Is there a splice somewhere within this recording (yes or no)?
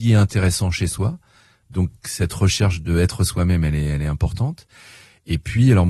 no